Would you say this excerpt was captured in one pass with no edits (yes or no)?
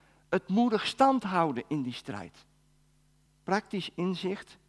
no